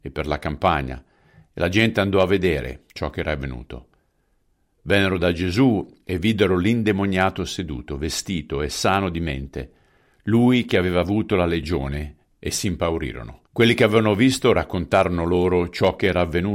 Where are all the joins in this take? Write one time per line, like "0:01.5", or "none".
0:13.5